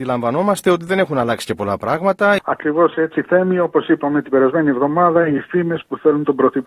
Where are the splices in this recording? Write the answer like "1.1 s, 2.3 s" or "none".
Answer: 2.4 s